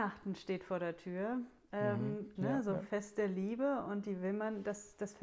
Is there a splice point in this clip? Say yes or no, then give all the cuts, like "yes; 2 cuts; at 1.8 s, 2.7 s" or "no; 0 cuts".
yes; 1 cut; at 2.4 s